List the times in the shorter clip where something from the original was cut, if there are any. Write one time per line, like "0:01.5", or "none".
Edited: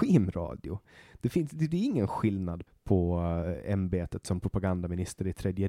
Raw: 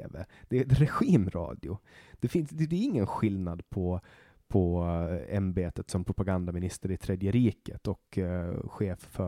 0:02.7